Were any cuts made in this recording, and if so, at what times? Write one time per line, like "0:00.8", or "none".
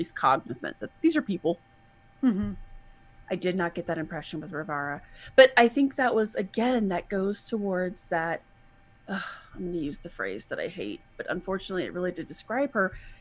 0:03.2